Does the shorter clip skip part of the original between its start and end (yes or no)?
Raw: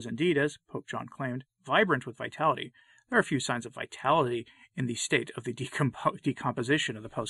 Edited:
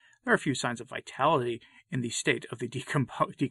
no